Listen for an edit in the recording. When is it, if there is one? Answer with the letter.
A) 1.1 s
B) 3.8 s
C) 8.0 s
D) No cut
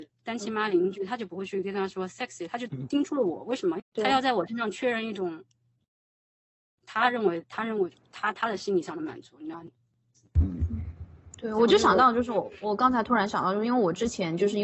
B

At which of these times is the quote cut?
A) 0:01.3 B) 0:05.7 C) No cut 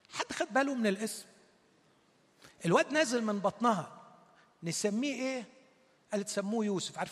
C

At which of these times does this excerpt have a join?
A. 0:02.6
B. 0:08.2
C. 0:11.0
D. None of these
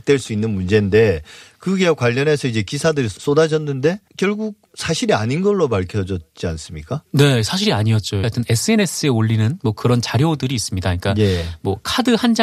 B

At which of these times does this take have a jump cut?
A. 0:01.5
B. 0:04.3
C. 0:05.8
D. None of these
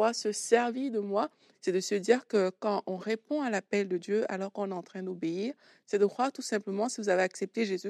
A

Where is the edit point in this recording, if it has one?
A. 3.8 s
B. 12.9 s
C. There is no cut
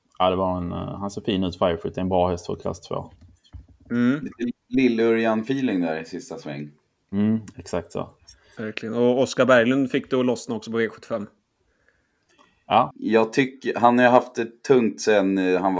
B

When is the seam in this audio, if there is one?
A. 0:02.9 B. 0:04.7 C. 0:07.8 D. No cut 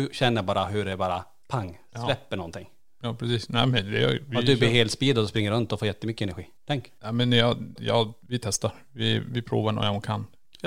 C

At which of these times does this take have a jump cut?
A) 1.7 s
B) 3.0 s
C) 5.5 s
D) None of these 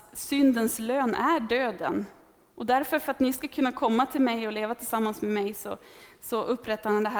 D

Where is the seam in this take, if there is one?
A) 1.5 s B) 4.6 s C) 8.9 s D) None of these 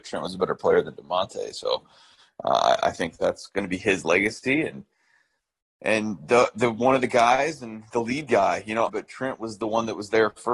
C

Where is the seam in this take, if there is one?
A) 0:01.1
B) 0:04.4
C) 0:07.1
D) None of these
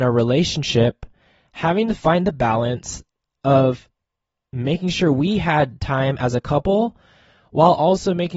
D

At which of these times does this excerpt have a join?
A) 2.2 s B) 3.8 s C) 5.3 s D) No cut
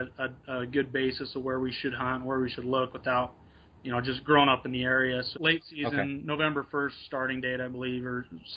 C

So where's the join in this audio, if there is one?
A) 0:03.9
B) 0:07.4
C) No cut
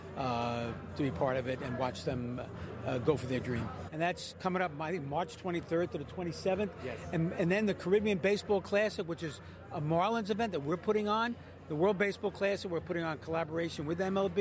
A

